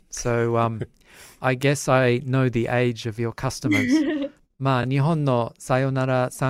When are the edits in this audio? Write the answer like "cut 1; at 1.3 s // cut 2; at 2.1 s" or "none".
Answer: none